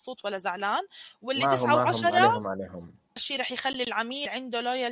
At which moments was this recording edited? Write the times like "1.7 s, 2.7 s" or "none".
3.2 s